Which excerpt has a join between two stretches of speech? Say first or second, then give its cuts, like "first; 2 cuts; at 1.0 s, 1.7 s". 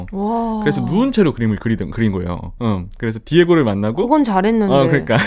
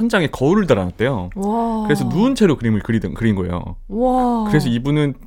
first; 1 cut; at 2.6 s